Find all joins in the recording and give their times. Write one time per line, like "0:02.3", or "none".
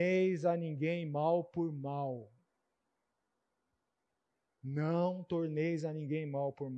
none